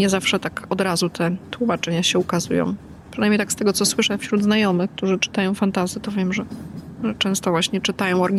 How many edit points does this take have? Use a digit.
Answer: 0